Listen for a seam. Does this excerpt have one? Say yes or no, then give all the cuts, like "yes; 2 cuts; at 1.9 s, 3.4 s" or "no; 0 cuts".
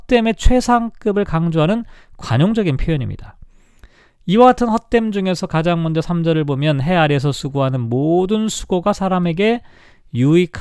no; 0 cuts